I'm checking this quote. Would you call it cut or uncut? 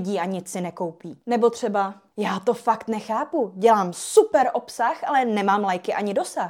uncut